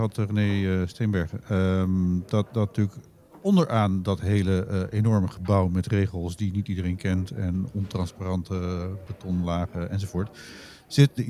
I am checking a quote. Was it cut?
no; 0 cuts

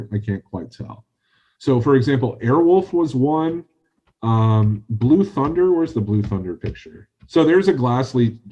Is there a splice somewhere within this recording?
yes; 1 cut; at 1.6 s

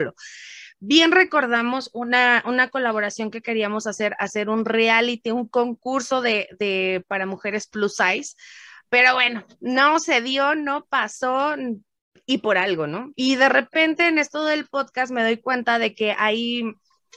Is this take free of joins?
no; 1 cut; at 13.1 s

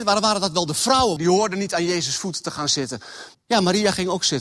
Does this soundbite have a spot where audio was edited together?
yes; 2 cuts; at 1.2 s, 3.3 s

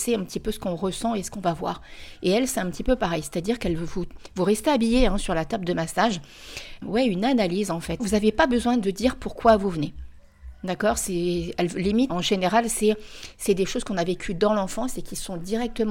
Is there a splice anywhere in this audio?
yes; 3 cuts; at 6.8 s, 8.0 s, 12.1 s

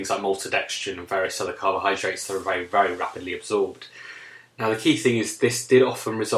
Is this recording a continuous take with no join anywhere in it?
yes; 0 cuts

